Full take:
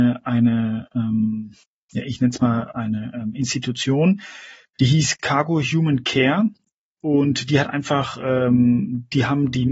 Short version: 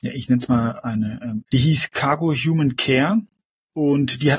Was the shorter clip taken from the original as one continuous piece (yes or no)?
no